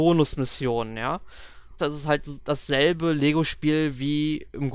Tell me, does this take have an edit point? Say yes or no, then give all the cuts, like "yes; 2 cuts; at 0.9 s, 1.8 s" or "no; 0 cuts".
yes; 1 cut; at 1.8 s